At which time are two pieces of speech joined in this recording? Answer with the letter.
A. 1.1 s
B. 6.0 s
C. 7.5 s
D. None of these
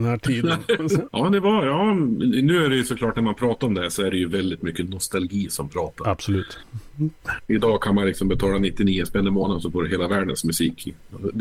A